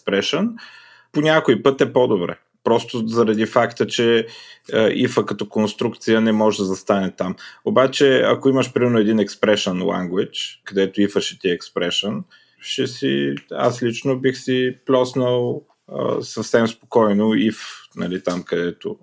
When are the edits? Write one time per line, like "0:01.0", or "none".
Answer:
none